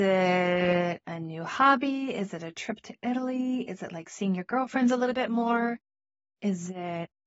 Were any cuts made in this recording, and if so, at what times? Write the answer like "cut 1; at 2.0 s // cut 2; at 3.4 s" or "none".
none